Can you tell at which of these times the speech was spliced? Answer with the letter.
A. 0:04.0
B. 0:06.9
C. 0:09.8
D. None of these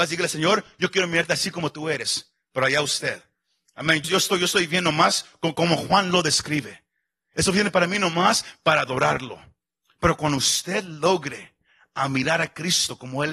A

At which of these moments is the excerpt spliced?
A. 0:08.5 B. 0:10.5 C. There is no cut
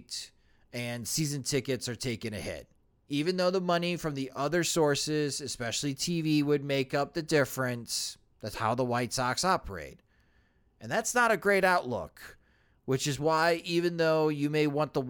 A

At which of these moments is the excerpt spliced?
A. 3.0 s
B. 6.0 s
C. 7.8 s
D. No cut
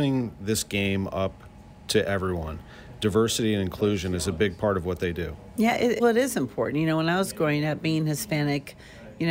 B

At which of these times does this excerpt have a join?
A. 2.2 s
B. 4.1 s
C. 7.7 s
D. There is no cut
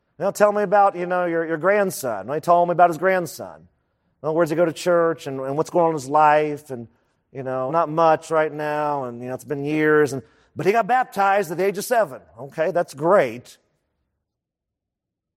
C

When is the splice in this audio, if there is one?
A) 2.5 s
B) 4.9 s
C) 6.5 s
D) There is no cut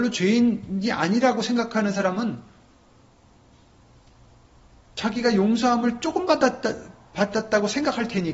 D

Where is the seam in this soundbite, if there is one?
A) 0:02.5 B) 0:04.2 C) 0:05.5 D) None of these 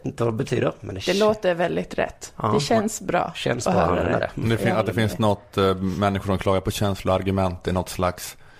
D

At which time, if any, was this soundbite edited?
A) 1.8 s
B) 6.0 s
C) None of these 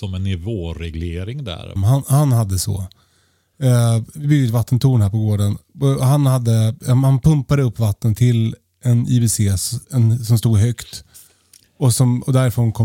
A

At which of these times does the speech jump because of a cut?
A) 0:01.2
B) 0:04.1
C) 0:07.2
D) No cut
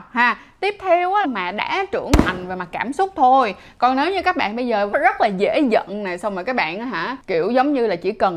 A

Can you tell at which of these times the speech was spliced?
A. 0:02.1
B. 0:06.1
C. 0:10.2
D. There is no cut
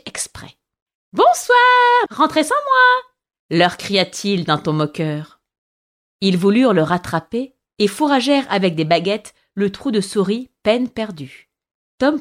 A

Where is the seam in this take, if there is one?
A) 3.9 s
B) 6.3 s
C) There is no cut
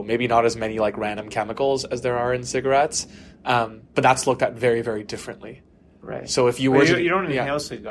A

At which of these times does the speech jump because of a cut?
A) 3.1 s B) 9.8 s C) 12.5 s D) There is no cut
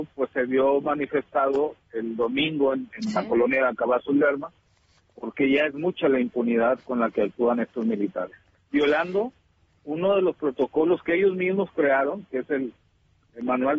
D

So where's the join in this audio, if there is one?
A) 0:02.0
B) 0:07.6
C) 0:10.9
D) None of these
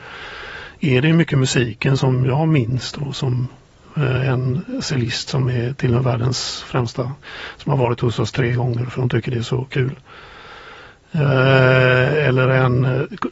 A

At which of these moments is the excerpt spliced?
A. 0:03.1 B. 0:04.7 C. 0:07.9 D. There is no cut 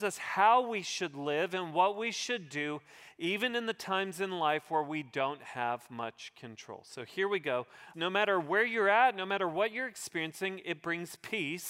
C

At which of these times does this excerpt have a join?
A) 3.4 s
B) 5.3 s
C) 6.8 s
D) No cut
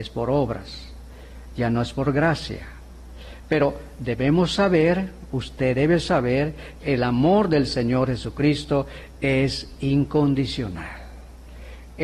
C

